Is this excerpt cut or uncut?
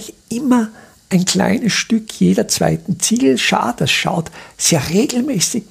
uncut